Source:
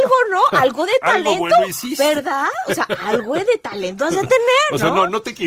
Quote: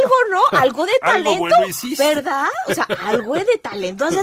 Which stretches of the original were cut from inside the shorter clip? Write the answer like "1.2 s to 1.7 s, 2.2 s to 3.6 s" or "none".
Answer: none